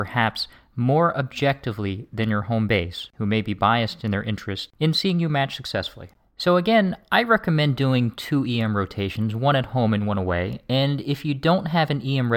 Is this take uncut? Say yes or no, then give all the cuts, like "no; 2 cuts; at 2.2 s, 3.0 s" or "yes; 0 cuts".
yes; 0 cuts